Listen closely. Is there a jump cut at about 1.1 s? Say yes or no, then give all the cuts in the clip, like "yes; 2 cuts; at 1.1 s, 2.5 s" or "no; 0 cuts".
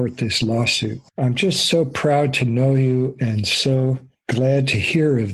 yes; 1 cut; at 1.1 s